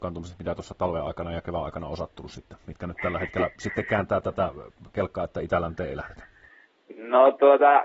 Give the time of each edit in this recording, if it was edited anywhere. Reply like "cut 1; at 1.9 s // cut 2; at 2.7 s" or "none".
none